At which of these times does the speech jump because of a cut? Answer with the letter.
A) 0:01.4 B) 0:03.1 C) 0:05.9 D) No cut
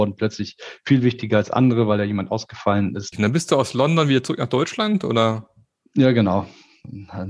B